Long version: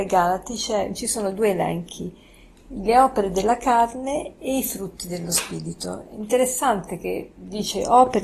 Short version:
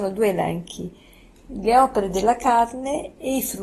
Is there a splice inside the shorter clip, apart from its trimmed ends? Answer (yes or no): no